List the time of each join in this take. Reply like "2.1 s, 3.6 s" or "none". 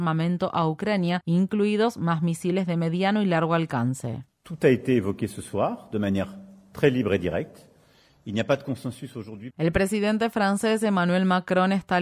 4.3 s, 9.5 s